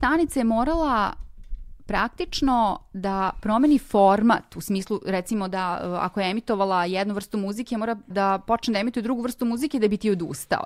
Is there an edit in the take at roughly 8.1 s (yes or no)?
yes